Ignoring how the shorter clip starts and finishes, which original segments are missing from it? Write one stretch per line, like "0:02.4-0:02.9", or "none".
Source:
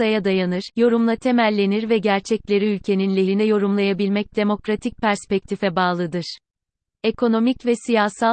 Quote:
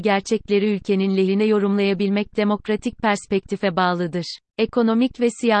0:06.5-0:06.9